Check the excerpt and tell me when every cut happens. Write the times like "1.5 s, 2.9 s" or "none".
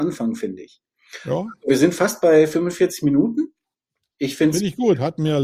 none